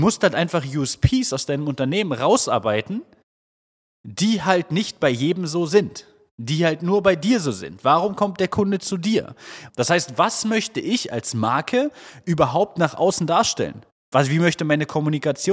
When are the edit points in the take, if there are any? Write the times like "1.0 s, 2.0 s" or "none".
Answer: 9.7 s